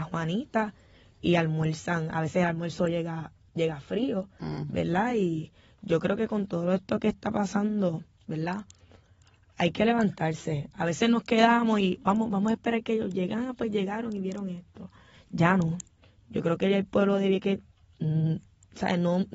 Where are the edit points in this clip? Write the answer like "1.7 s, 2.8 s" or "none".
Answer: none